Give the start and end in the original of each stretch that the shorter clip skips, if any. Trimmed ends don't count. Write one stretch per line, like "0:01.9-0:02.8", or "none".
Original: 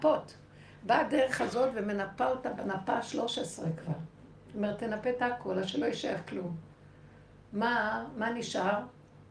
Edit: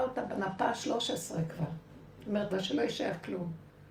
0:04.8-0:05.5